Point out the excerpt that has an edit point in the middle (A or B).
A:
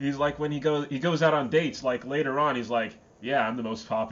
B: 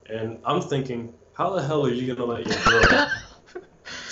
B